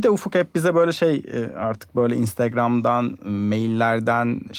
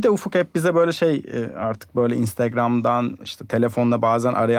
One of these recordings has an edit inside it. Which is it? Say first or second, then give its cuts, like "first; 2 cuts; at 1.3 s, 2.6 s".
second; 1 cut; at 3.2 s